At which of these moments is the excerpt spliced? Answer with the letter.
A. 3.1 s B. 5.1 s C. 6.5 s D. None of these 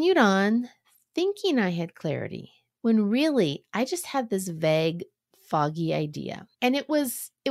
C